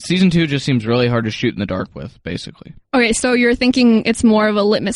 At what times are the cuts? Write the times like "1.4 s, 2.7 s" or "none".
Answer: none